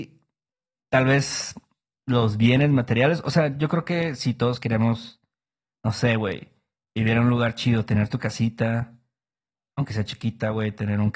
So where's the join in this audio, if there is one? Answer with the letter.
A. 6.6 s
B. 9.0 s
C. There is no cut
C